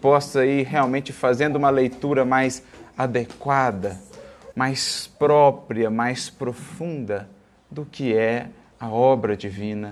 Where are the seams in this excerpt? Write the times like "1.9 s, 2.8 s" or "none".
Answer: 4.5 s